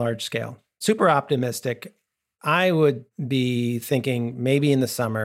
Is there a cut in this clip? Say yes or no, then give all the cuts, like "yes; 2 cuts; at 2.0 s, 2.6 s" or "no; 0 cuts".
no; 0 cuts